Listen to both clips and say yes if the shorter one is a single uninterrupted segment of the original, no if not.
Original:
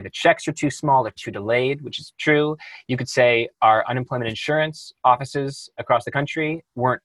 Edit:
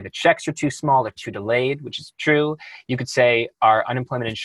yes